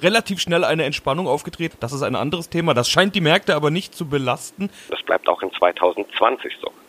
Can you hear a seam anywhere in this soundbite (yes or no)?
yes